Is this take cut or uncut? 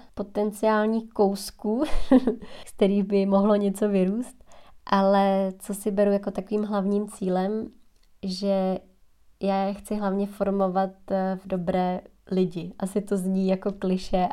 uncut